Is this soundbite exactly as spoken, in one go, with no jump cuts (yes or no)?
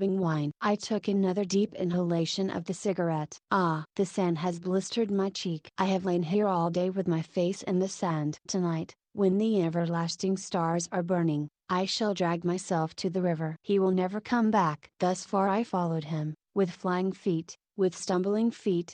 yes